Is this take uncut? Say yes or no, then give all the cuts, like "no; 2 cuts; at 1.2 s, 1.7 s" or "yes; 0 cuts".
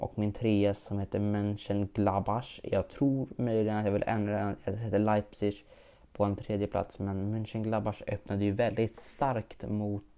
yes; 0 cuts